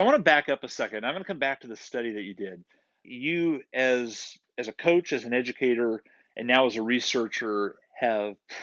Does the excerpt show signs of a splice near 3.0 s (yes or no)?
yes